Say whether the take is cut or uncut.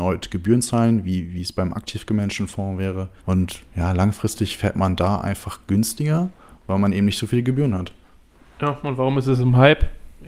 cut